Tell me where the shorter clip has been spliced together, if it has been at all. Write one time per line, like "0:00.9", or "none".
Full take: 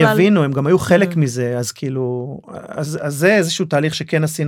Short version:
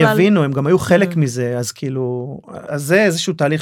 0:02.7